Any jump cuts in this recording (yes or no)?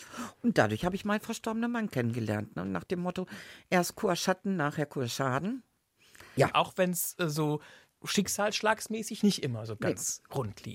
yes